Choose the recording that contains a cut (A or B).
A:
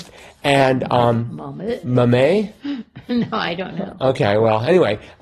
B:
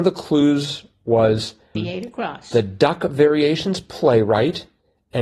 B